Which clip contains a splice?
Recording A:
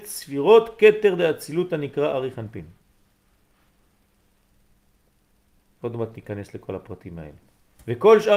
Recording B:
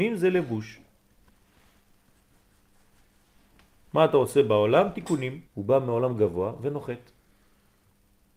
B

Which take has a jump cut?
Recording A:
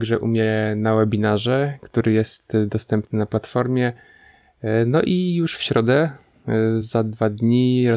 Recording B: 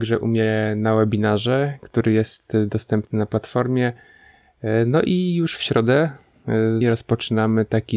B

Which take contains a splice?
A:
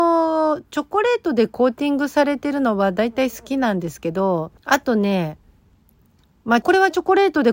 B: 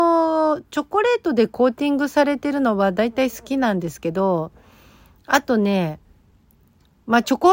A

